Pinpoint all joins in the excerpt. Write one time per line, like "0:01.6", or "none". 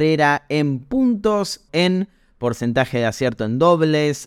0:01.7